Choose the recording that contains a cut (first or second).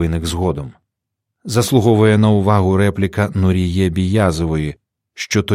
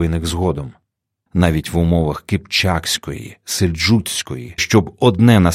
second